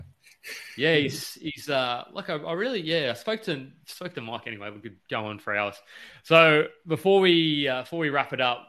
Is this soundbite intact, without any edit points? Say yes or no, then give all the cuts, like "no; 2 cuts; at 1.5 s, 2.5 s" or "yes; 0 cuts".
yes; 0 cuts